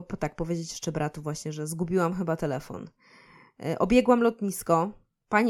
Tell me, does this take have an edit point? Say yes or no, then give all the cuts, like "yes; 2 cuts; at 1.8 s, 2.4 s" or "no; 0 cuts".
no; 0 cuts